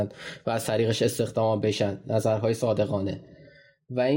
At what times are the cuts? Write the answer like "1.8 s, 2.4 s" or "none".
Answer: none